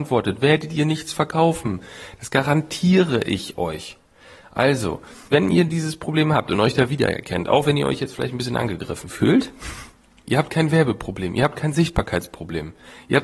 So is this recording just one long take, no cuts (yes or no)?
no